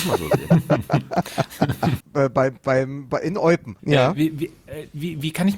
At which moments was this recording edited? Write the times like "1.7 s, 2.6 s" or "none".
2.0 s, 3.8 s